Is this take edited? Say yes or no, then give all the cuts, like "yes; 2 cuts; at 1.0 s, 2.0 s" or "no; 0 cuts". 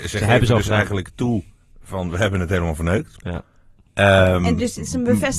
no; 0 cuts